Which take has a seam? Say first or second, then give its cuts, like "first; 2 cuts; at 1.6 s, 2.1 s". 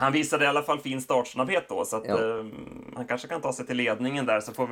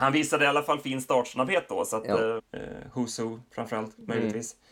second; 1 cut; at 2.4 s